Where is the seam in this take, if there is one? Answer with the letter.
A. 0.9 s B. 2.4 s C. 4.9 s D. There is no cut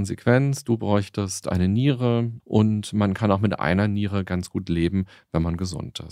B